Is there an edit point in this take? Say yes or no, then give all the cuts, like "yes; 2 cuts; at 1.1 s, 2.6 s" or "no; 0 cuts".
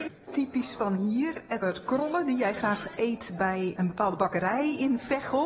yes; 2 cuts; at 1.6 s, 3.8 s